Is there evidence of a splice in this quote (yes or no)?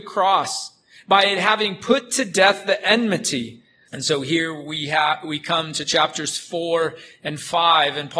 yes